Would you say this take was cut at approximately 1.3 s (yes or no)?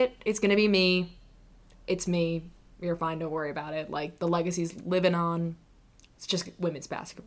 no